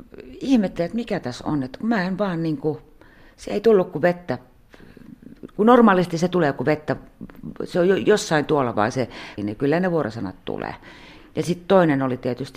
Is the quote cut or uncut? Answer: cut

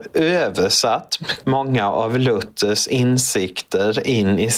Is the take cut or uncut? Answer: cut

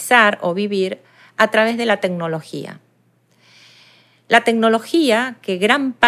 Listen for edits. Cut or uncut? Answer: uncut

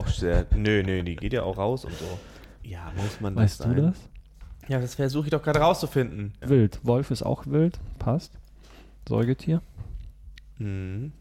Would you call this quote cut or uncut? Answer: cut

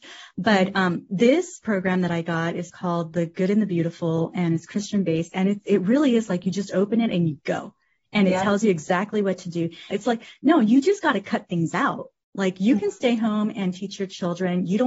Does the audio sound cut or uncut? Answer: cut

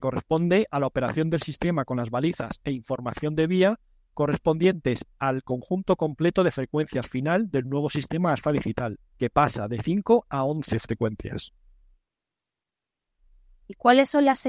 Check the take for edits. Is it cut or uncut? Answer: cut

